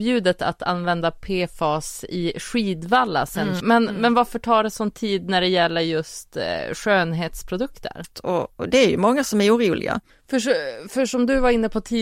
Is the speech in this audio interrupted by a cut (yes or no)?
yes